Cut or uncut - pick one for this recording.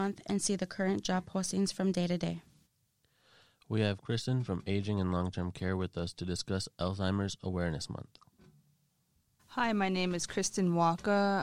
uncut